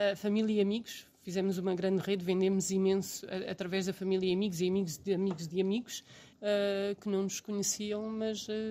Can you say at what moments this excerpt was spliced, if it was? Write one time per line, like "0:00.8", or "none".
0:06.3